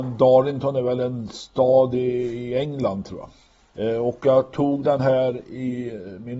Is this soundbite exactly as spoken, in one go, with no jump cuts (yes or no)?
yes